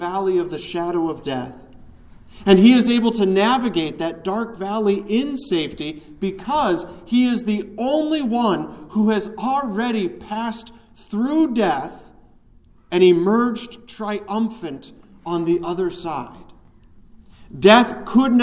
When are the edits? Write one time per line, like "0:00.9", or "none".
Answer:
none